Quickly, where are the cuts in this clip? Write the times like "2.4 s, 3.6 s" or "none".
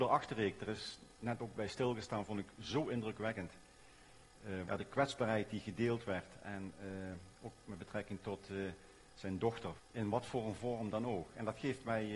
4.6 s, 9.8 s